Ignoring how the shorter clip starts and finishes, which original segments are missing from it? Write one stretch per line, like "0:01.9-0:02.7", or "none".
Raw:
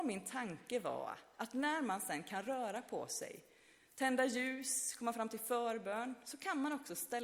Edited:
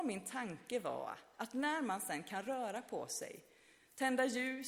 none